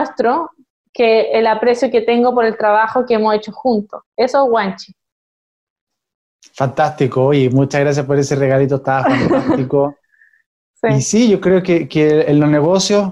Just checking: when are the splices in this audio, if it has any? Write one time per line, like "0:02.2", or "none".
none